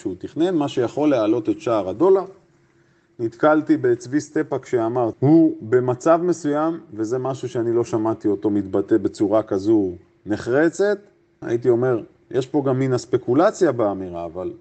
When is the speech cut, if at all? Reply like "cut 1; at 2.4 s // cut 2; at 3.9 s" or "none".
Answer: cut 1; at 5.1 s // cut 2; at 11.4 s